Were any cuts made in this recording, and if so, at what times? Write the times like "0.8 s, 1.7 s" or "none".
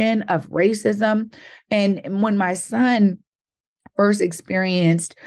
none